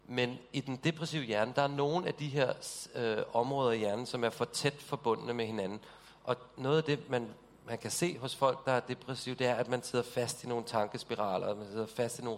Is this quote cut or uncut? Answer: uncut